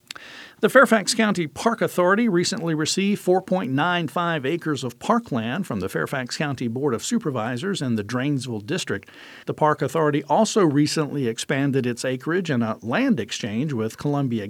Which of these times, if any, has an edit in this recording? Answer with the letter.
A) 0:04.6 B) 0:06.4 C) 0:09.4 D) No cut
C